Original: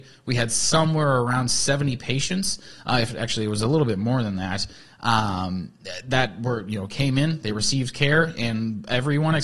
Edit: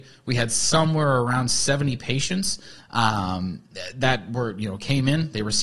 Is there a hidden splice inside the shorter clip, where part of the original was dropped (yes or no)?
yes